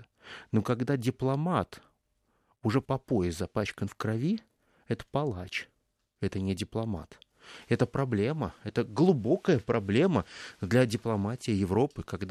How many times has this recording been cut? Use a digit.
1